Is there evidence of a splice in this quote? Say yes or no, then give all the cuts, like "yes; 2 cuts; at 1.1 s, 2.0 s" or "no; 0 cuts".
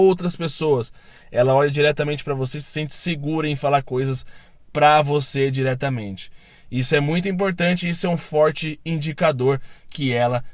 no; 0 cuts